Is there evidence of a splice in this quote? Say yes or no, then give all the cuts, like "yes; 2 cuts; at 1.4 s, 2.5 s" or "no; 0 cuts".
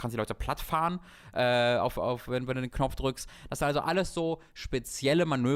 no; 0 cuts